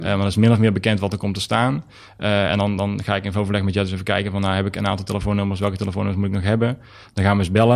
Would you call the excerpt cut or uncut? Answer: uncut